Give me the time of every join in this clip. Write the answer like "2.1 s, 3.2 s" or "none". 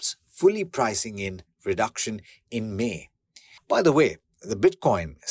3.6 s